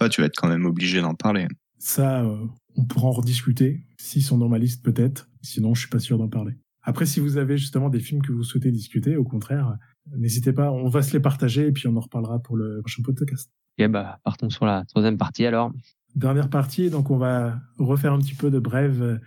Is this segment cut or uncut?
uncut